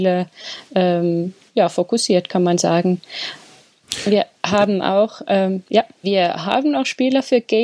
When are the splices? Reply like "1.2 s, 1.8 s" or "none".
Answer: 6.0 s